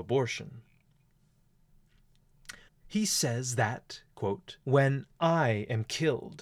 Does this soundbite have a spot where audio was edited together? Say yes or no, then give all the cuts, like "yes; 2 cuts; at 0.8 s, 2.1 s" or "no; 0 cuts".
yes; 2 cuts; at 2.7 s, 4.6 s